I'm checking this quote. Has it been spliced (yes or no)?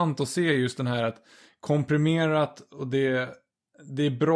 no